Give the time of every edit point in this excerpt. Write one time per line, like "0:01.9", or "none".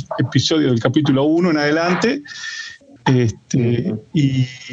0:03.0